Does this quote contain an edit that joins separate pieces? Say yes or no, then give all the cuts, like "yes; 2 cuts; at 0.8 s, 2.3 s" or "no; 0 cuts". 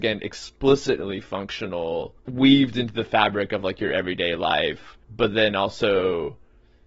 yes; 2 cuts; at 2.2 s, 5.0 s